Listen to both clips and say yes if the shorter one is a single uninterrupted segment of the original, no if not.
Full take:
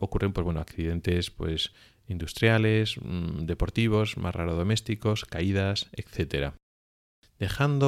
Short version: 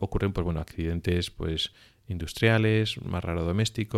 no